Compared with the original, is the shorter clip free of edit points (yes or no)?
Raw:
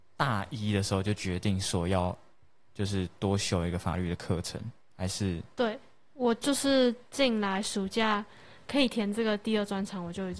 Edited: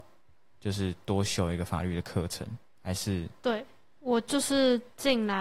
yes